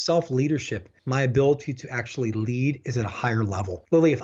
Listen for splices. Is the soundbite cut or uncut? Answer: cut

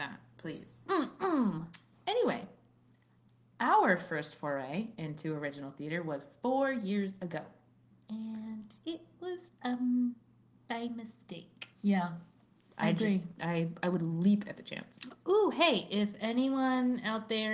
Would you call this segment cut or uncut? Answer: cut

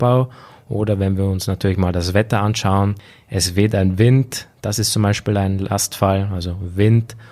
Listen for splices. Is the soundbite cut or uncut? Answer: uncut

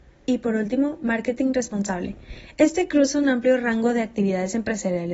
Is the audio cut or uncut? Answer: uncut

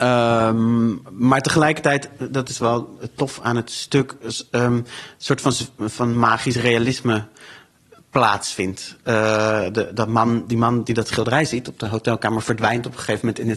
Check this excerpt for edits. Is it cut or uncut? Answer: uncut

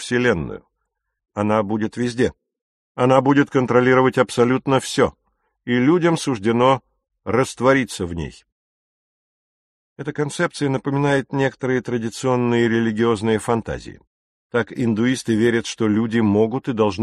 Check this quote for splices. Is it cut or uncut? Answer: cut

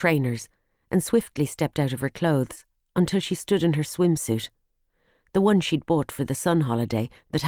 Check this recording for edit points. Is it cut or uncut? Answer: uncut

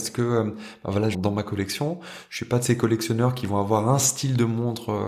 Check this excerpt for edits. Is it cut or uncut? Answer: cut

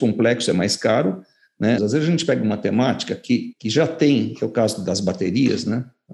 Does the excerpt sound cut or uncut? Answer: cut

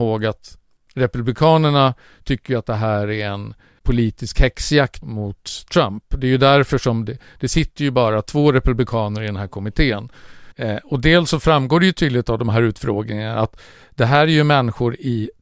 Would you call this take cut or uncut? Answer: cut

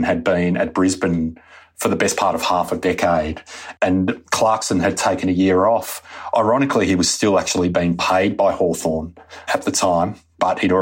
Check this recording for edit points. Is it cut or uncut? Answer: uncut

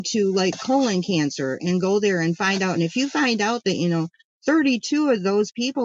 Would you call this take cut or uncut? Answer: uncut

